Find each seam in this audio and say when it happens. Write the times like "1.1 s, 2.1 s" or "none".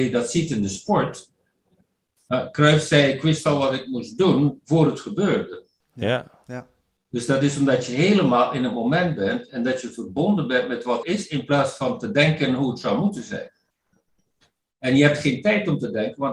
11.0 s